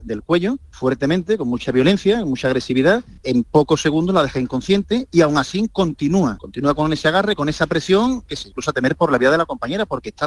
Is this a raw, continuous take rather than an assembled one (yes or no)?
yes